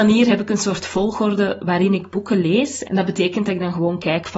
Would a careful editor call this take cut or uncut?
cut